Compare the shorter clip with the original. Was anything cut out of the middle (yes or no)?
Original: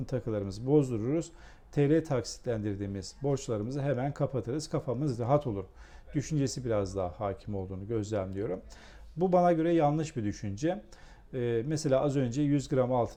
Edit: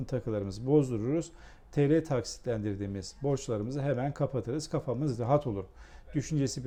no